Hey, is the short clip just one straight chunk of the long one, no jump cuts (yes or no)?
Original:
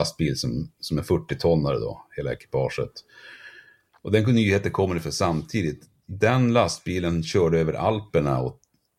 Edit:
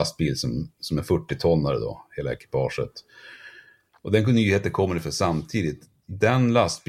yes